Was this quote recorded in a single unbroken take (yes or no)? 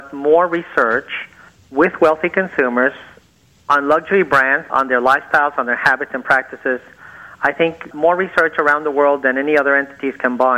no